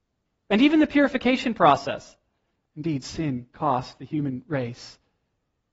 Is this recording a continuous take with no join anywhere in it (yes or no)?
no